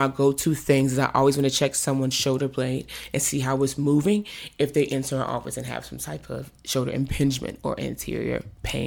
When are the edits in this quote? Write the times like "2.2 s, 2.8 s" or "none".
none